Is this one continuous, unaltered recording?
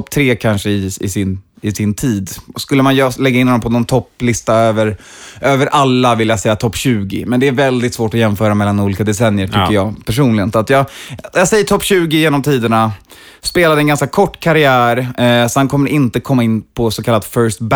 yes; 0 cuts

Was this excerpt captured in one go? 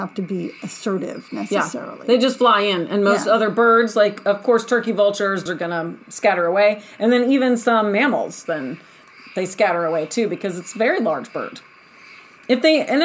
no; 2 cuts; at 5.5 s, 8.5 s

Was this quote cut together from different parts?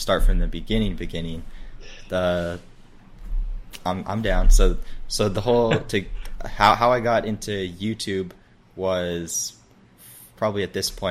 no; 0 cuts

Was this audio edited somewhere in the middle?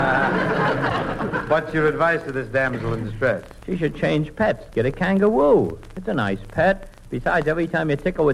no; 0 cuts

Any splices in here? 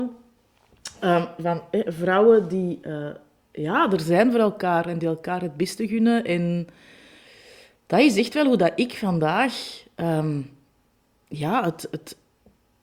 no; 0 cuts

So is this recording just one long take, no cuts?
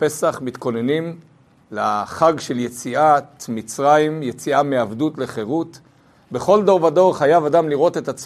yes; 0 cuts

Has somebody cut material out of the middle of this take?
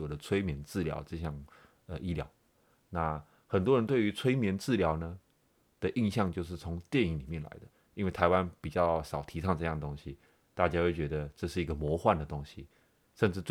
no; 0 cuts

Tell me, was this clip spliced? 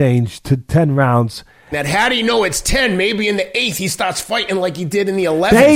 yes; 1 cut; at 1.7 s

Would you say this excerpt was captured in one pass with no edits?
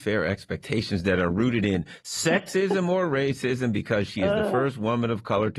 yes; 0 cuts

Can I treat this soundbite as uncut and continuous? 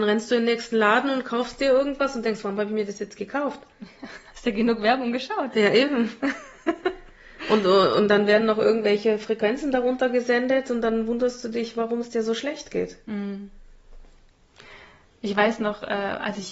yes; 0 cuts

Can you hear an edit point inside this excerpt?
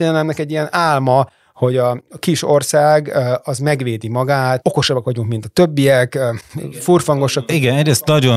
no; 0 cuts

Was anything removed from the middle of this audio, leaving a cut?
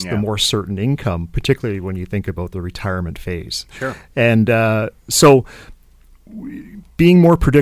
no; 0 cuts

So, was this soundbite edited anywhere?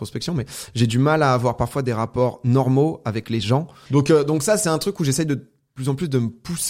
yes; 1 cut; at 3.9 s

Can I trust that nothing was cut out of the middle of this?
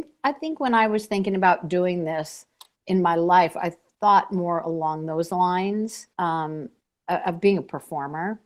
no; 1 cut; at 6.1 s

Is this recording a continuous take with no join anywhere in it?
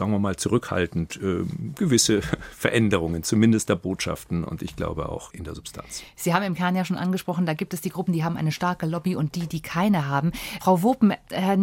yes; 0 cuts

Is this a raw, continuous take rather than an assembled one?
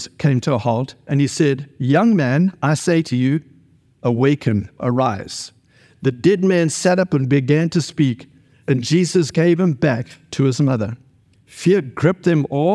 yes; 0 cuts

